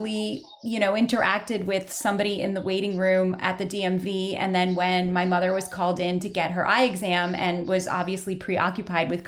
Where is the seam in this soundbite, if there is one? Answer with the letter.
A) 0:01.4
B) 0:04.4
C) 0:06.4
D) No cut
D